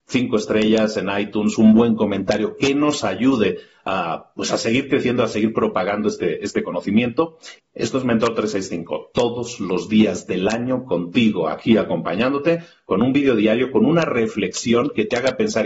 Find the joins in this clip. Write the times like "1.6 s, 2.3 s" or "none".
7.6 s